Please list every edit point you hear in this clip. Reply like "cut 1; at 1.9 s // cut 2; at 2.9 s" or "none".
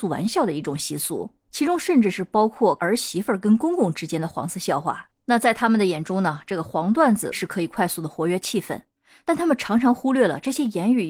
none